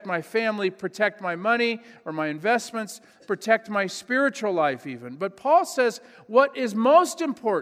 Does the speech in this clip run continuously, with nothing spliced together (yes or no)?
yes